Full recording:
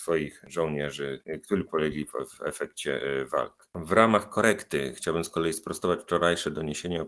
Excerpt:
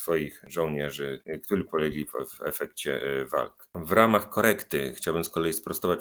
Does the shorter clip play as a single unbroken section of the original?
yes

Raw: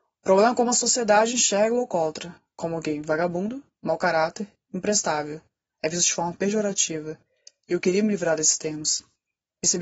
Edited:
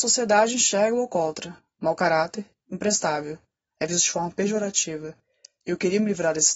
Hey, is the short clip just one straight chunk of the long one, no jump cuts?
no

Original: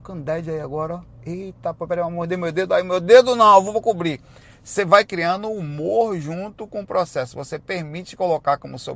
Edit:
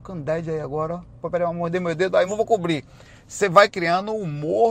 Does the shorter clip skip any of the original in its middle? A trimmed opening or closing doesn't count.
yes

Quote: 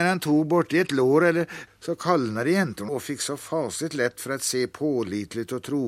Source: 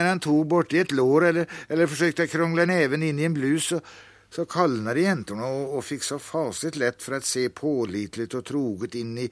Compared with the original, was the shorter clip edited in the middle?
yes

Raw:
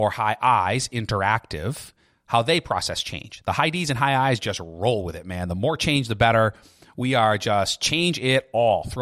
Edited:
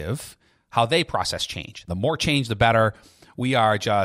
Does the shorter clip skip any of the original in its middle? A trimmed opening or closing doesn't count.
yes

